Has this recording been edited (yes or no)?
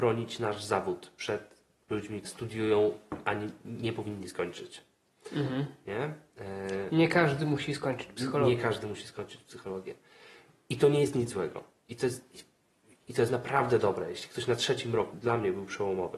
yes